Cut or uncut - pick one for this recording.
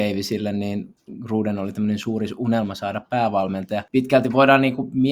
cut